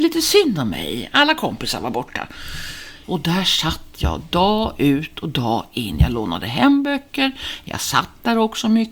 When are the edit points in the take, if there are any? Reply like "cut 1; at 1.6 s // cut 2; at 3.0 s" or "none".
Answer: cut 1; at 3.0 s